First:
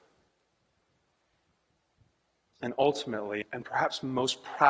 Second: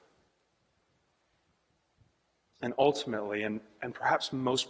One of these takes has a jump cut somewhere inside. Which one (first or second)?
first